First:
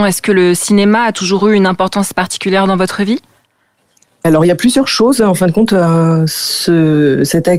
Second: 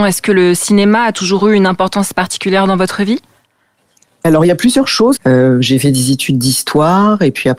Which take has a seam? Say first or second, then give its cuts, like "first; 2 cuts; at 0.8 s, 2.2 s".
second; 1 cut; at 5.2 s